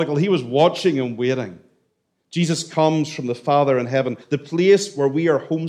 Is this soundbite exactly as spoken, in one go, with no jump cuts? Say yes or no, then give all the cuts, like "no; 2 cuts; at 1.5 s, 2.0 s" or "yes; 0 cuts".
no; 1 cut; at 4.2 s